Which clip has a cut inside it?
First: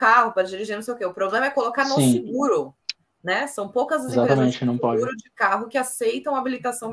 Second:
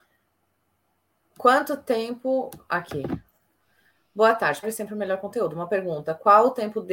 second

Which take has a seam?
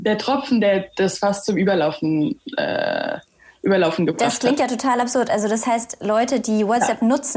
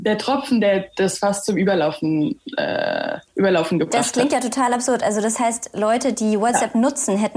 second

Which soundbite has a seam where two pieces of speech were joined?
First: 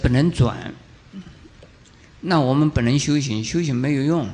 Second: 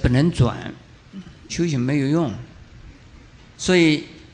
second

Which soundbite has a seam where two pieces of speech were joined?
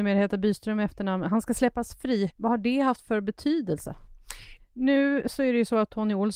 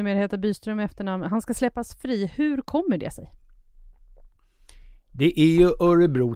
first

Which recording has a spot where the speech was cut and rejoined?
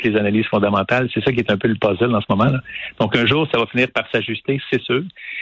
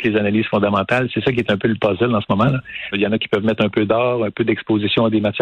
second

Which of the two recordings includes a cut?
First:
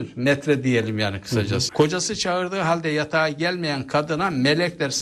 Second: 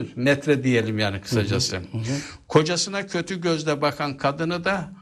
first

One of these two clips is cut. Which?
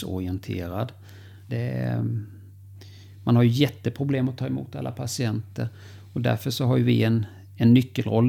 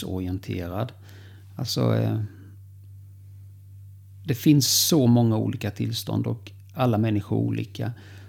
first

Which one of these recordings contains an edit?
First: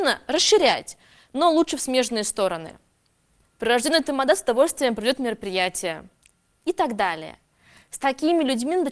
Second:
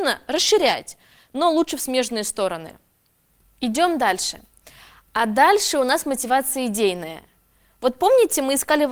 first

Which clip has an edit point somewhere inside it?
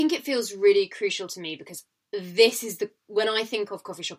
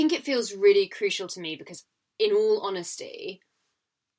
first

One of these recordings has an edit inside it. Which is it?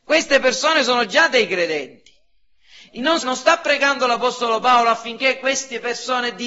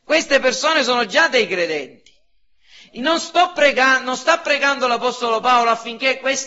first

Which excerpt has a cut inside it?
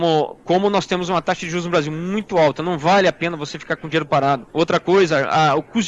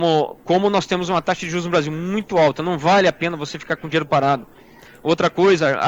first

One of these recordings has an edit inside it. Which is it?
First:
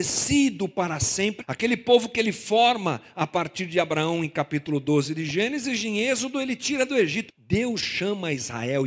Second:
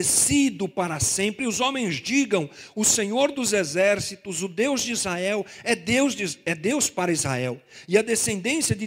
first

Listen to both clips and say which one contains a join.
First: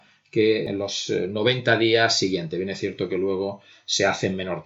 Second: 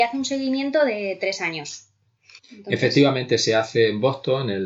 second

